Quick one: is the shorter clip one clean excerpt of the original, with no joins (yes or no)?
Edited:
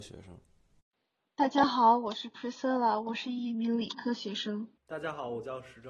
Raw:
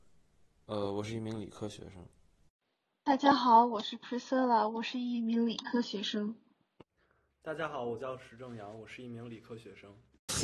no